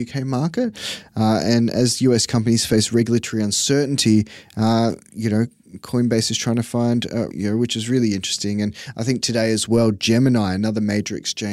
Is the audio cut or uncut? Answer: cut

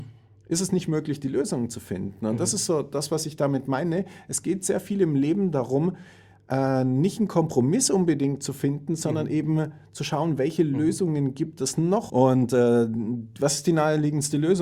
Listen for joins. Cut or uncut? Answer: cut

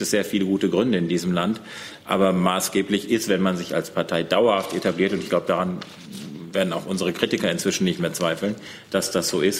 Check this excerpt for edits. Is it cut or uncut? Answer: uncut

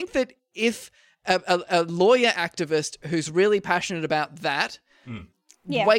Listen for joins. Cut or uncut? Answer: uncut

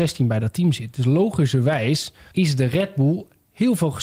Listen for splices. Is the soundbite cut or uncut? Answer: cut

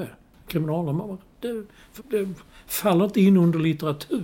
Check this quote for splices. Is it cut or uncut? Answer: cut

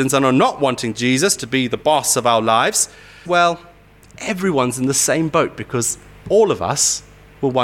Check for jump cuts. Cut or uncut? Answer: cut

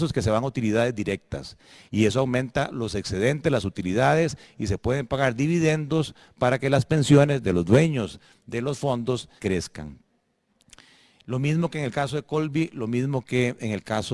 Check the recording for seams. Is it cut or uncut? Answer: cut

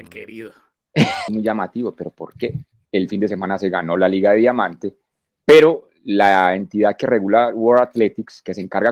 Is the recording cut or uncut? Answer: cut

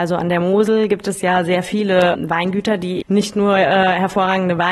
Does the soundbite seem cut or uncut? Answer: cut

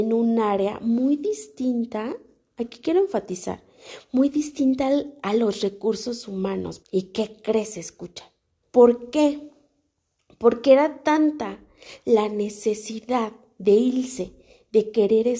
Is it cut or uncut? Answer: cut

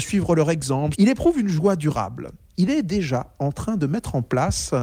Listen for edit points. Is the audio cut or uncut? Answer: cut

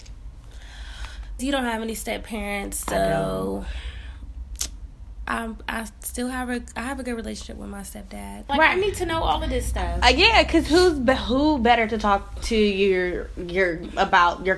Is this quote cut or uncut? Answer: cut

